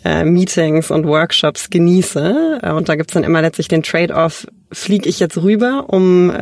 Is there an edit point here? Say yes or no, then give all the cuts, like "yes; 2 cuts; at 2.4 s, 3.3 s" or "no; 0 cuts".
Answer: yes; 1 cut; at 2.6 s